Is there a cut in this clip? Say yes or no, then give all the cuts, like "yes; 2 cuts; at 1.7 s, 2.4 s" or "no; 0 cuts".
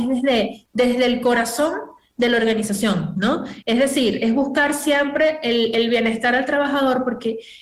no; 0 cuts